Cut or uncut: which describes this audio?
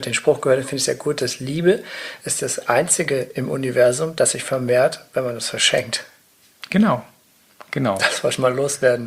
uncut